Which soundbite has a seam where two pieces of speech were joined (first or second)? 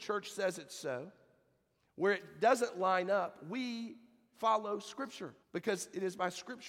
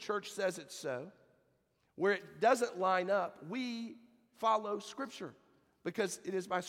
first